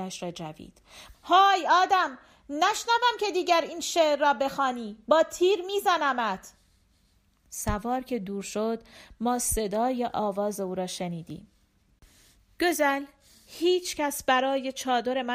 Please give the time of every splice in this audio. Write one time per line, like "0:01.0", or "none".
0:01.1